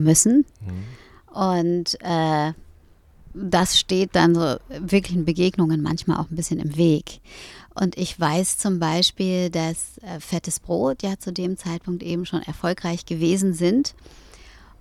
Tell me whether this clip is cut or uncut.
uncut